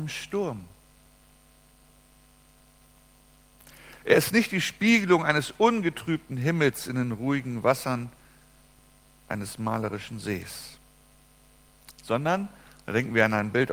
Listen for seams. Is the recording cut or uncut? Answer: uncut